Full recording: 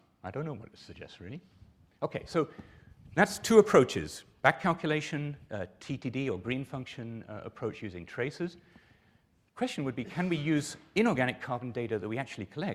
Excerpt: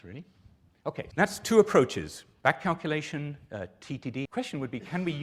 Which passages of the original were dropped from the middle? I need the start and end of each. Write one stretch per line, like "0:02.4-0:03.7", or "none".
0:02.3-0:03.1
0:06.2-0:09.5